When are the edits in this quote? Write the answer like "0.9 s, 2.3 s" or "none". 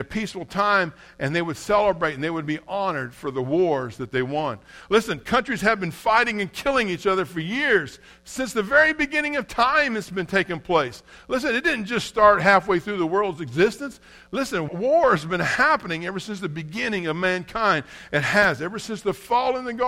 14.7 s